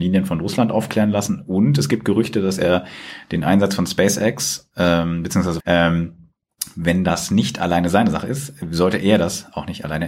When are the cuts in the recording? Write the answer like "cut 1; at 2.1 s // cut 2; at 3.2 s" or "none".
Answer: cut 1; at 5.6 s